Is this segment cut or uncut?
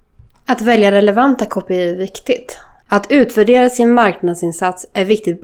cut